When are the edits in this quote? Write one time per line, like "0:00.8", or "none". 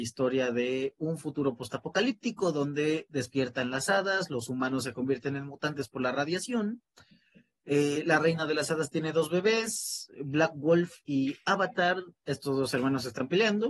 none